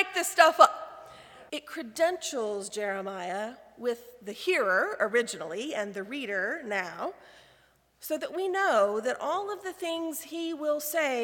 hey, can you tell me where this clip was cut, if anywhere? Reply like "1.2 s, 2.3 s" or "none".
1.5 s